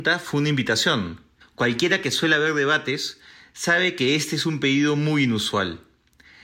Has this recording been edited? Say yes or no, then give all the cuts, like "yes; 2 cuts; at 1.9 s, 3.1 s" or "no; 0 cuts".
yes; 1 cut; at 1.4 s